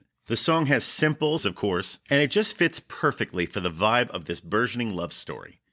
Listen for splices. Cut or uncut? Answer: cut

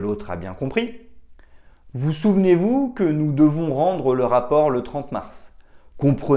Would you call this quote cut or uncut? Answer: uncut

